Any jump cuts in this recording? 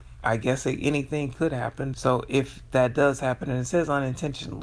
yes; 1 cut; at 1.9 s

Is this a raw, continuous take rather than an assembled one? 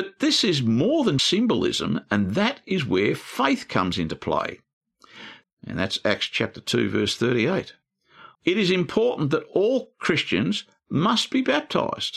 no; 3 cuts; at 1.2 s, 5.4 s, 8.3 s

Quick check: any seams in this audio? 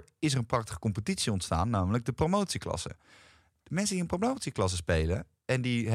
no; 0 cuts

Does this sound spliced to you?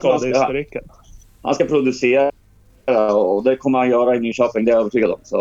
no; 0 cuts

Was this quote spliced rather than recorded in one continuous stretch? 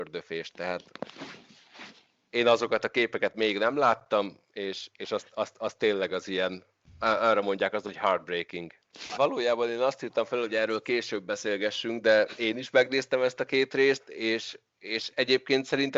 yes; 1 cut; at 9.1 s

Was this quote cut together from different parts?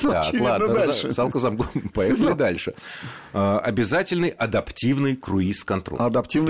no; 0 cuts

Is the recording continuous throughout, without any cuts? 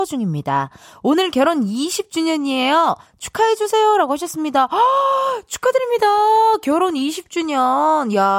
yes; 0 cuts

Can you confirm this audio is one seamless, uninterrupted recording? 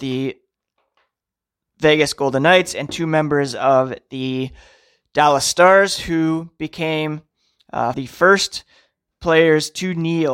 no; 1 cut; at 7.9 s

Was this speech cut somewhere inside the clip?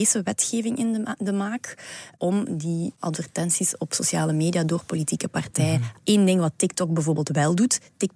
yes; 1 cut; at 6.0 s

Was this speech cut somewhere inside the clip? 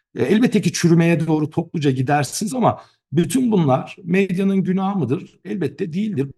yes; 1 cut; at 2.5 s

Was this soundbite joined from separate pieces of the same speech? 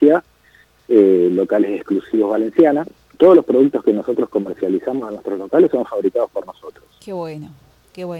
yes; 1 cut; at 3.1 s

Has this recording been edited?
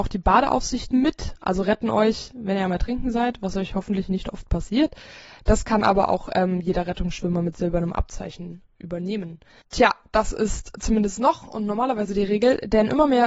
no; 0 cuts

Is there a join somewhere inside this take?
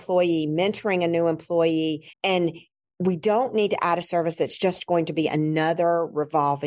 yes; 1 cut; at 2.1 s

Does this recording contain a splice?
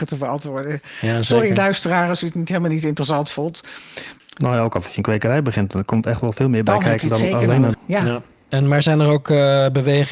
yes; 2 cuts; at 4.2 s, 7.7 s

